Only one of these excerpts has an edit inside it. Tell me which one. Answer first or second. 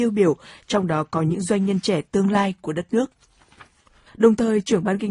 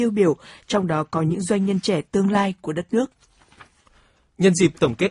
first